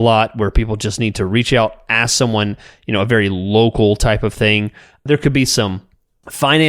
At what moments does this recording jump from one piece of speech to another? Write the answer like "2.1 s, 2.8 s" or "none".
none

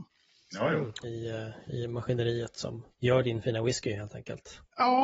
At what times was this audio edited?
1.0 s, 2.9 s

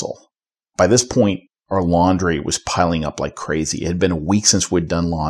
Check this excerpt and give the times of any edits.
none

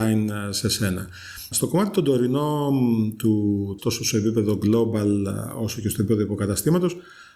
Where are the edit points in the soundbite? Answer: 1.5 s, 3.8 s

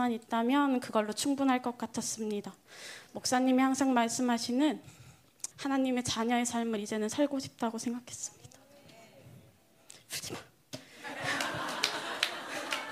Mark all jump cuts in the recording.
5.5 s

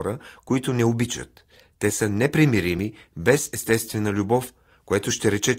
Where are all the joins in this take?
none

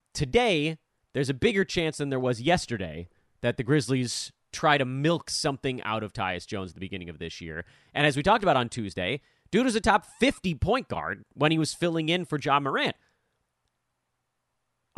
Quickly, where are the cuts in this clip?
none

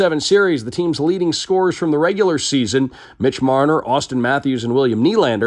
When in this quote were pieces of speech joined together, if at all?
none

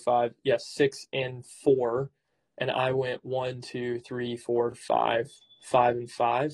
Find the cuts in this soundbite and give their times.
none

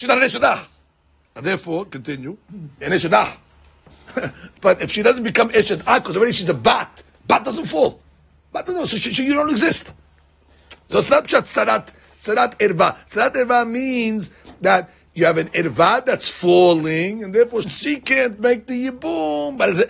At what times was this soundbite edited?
2.8 s, 17.6 s

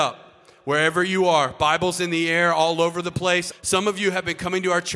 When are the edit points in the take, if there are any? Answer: 3.5 s

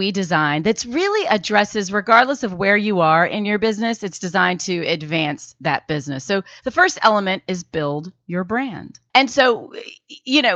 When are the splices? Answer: none

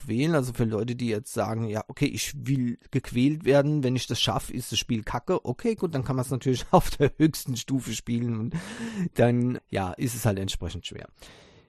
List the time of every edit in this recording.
9.6 s

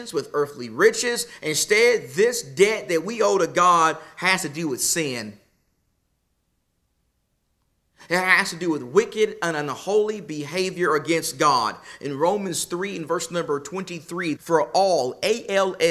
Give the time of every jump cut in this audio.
14.4 s

